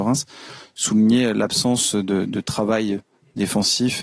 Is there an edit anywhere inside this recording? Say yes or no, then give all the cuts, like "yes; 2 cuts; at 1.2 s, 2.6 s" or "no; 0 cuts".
no; 0 cuts